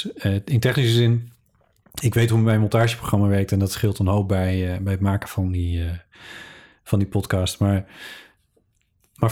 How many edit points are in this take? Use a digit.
0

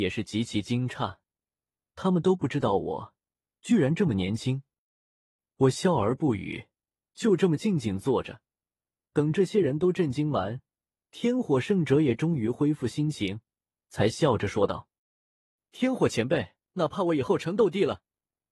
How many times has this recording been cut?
1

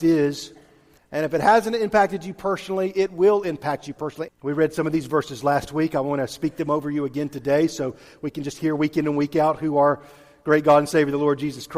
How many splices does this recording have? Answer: 2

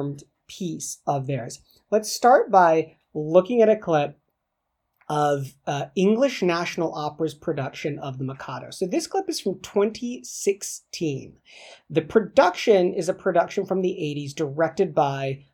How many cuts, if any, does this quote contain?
0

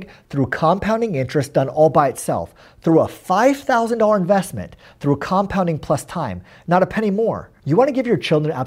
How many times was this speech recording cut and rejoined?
0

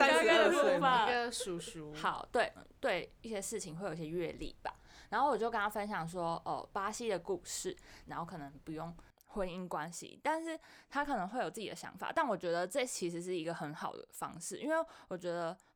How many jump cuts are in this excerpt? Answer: 2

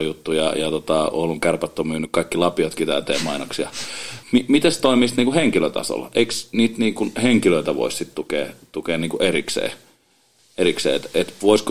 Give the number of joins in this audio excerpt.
1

